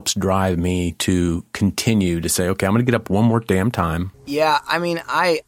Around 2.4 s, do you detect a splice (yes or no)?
no